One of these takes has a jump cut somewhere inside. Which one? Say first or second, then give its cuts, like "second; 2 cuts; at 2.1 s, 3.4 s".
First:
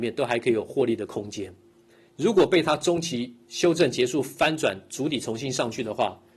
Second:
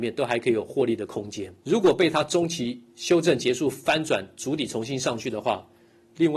second; 1 cut; at 1.6 s